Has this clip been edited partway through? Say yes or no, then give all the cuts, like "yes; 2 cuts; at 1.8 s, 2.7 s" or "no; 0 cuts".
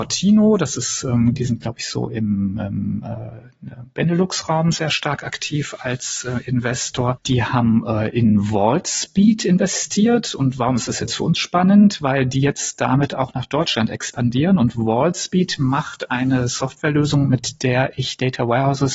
no; 0 cuts